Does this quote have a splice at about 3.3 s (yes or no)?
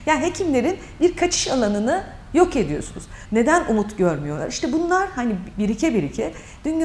yes